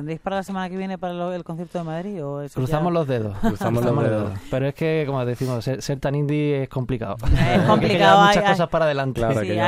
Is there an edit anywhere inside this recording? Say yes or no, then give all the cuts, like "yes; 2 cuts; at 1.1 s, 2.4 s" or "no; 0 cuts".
no; 0 cuts